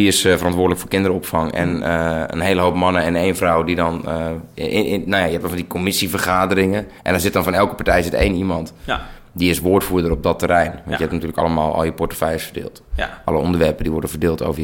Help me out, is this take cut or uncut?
cut